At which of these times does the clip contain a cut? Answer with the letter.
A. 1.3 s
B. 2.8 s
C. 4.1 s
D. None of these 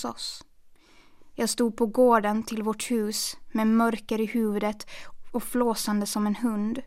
D